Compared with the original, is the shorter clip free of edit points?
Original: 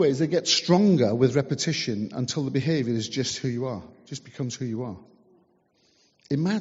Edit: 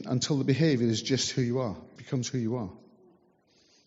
no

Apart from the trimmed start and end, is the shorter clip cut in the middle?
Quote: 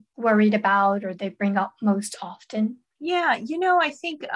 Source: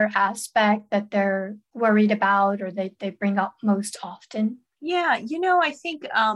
yes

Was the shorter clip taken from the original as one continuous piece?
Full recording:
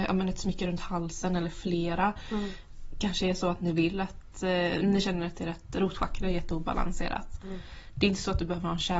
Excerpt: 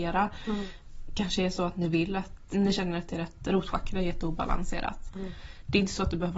no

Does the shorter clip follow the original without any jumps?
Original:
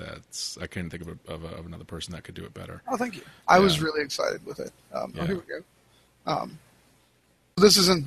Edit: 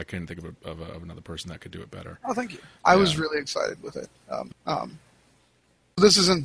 no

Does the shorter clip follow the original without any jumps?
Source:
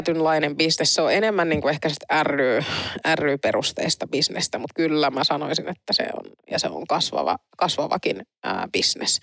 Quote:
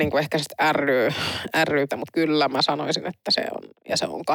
no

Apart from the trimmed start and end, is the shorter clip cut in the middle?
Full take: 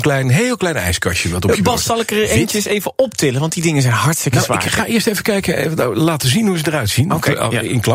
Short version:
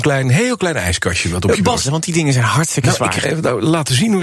yes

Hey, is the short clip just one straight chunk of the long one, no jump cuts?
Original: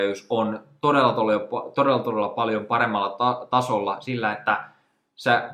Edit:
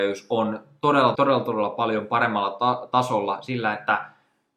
no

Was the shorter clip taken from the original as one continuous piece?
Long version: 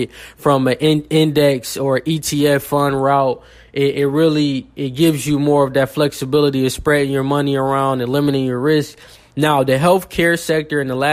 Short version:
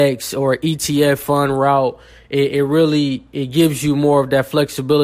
yes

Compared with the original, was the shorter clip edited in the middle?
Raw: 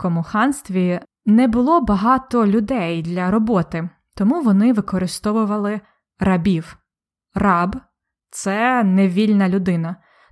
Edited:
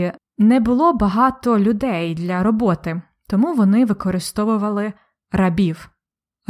no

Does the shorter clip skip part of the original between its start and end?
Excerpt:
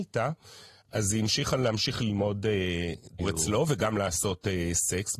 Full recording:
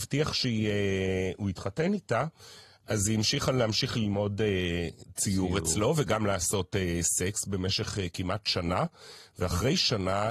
yes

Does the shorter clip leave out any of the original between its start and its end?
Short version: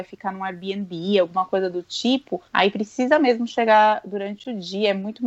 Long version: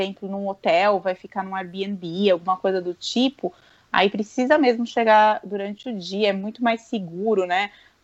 yes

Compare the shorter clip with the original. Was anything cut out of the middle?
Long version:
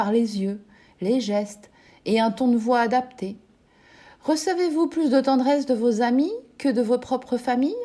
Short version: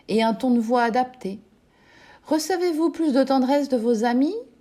no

